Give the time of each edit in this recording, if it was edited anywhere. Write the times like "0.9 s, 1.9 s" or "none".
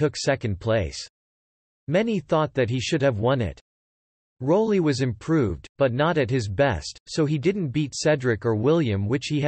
none